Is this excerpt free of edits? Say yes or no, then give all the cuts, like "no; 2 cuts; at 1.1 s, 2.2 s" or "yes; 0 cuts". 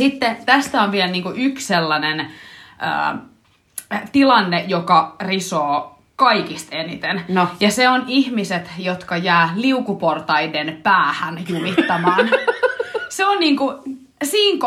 yes; 0 cuts